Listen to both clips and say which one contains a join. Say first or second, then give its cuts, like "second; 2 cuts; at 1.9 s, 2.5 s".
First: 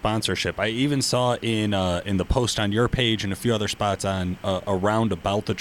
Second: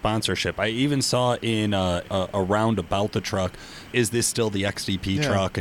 second; 2 cuts; at 2.0 s, 3.9 s